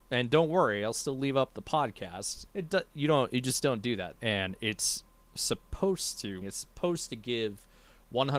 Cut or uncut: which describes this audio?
cut